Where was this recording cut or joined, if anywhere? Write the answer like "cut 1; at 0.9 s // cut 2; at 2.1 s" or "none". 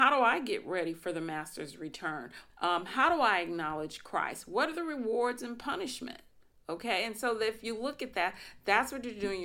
cut 1; at 2.5 s